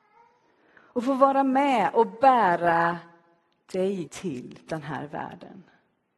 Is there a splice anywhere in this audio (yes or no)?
yes